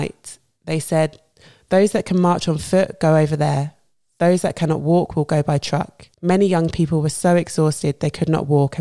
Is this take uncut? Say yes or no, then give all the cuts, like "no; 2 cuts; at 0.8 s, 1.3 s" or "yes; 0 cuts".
no; 1 cut; at 6.1 s